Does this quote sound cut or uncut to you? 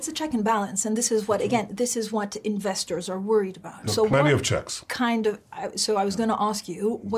uncut